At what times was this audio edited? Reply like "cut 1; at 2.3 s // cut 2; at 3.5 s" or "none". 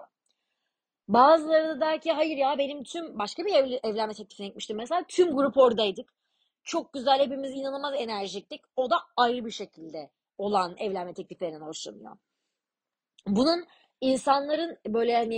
none